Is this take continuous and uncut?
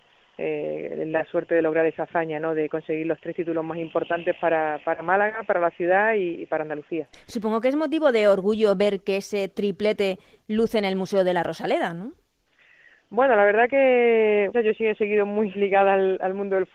no; 2 cuts; at 14.5 s, 15.5 s

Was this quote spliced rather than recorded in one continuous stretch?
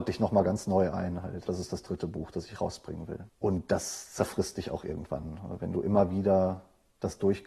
yes; 2 cuts; at 1.5 s, 3.3 s

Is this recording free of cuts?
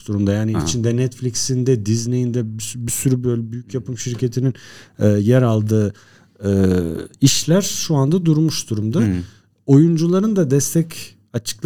yes; 0 cuts

